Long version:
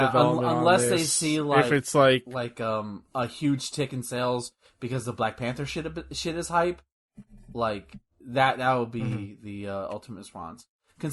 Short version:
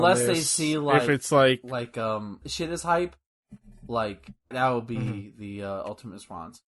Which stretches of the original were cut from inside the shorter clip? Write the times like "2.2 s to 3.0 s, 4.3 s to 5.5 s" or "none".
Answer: 3.0 s to 6.1 s, 8.2 s to 8.6 s

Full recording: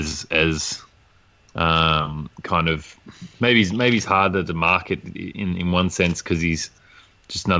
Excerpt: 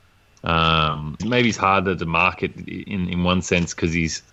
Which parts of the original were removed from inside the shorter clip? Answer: 2.3 s to 3.7 s

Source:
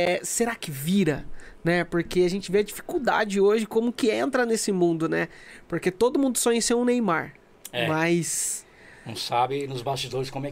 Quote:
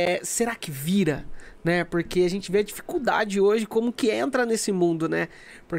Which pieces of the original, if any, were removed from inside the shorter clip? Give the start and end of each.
none

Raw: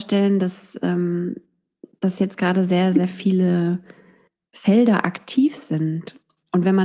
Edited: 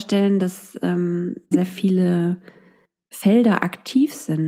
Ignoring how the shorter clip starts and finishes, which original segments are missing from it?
1.5 s to 2.9 s

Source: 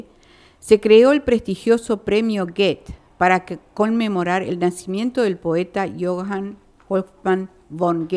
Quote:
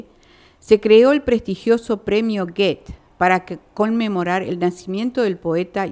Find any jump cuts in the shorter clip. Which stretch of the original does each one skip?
none

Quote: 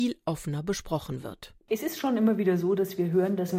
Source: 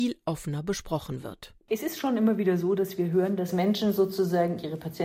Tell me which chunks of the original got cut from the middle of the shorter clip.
none

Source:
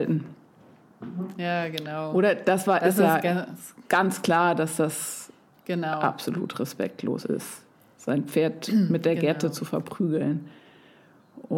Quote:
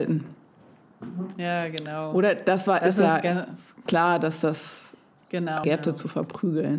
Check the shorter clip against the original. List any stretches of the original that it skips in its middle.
3.9 s to 4.2 s, 6.0 s to 9.2 s

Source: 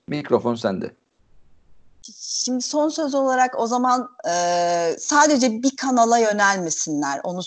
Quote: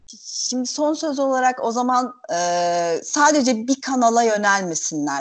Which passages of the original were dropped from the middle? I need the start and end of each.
none

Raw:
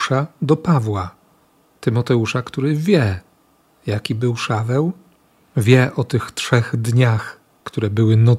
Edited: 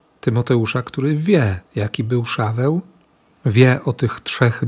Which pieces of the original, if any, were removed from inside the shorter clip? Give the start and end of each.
3.3 s to 3.8 s

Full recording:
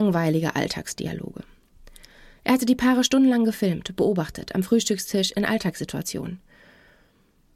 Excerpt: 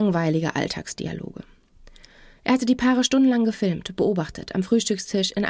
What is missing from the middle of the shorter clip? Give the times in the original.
none

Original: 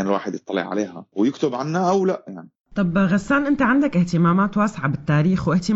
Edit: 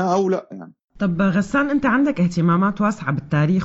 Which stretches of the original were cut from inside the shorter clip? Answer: none

